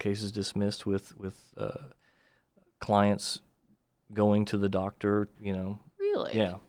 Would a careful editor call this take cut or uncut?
cut